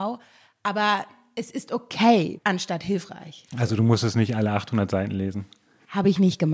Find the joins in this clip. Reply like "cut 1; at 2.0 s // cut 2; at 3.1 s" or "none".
cut 1; at 2.4 s